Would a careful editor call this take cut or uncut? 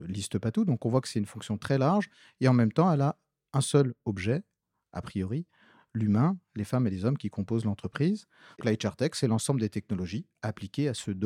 cut